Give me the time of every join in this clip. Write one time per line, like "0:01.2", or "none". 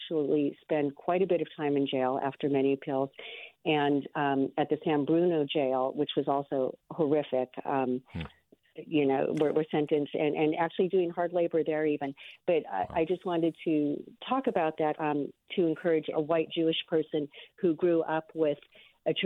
0:14.9
0:16.1